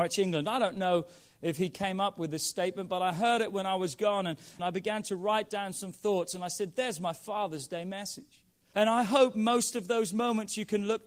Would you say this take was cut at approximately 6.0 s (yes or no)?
no